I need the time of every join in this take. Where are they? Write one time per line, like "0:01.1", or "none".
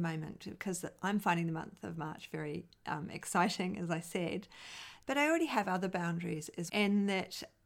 0:05.0
0:06.7